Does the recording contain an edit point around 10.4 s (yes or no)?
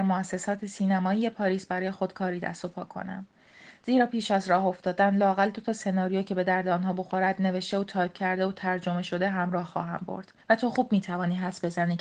yes